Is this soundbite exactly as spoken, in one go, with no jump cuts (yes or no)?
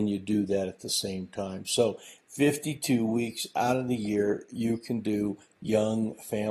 yes